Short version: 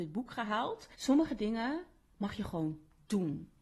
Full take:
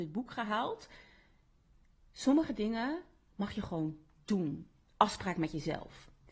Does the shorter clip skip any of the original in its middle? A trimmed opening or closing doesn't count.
yes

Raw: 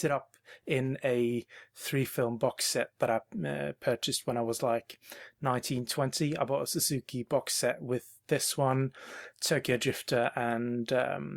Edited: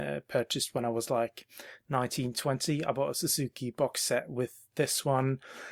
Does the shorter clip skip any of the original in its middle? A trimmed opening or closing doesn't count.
no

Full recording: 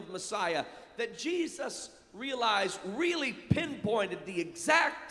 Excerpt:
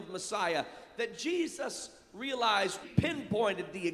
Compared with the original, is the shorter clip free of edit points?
no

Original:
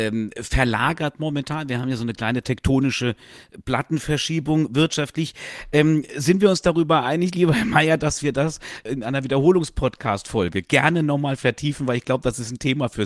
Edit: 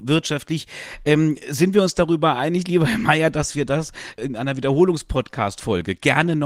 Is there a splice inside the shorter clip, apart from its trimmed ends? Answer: no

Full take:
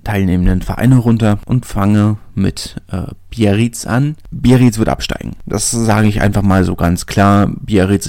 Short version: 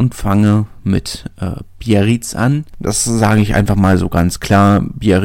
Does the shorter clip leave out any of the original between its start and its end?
yes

